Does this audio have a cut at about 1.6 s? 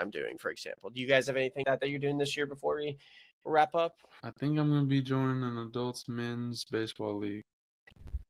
yes; 1 cut; at 1.6 s

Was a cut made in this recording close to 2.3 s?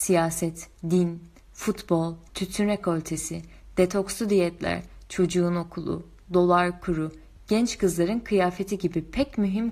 yes; 1 cut; at 2.3 s

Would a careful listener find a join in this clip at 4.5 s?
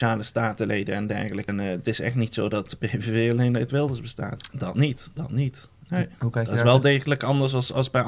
yes; 2 cuts; at 1.5 s, 4.5 s

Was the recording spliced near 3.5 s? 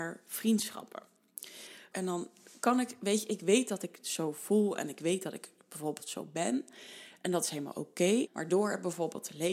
no; 2 cuts; at 1.9 s, 8.3 s

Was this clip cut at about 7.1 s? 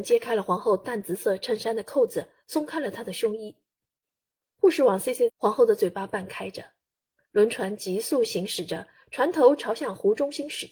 no; 1 cut; at 5.3 s

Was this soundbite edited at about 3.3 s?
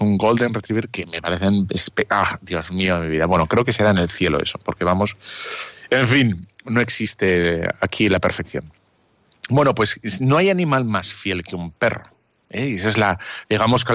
no; 0 cuts

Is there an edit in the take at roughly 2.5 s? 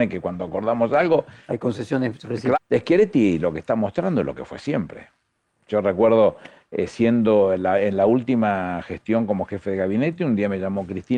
yes; 1 cut; at 2.5 s

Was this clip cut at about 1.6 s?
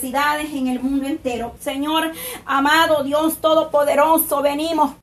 yes; 1 cut; at 1.6 s

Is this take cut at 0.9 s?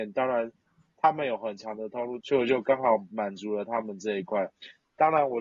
no; 1 cut; at 2.2 s

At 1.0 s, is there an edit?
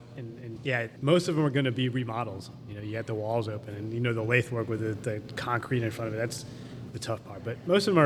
yes; 1 cut; at 1.0 s

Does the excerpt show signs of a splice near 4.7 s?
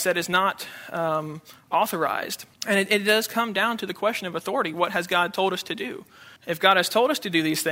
no; 2 cuts; at 2.5 s, 6.4 s

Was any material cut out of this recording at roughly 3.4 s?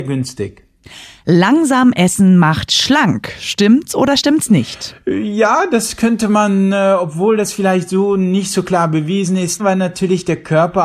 no; 1 cut; at 9.6 s

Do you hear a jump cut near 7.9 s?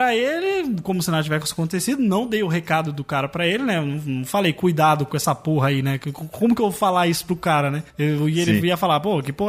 yes; 1 cut; at 7.9 s

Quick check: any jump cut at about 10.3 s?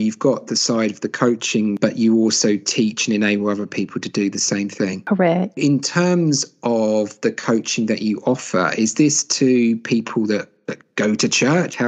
no; 1 cut; at 1.8 s

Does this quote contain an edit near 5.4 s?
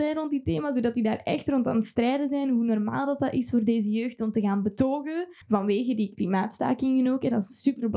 yes; 1 cut; at 5.4 s

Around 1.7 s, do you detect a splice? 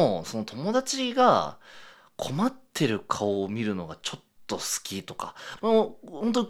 no; 1 cut; at 5.6 s

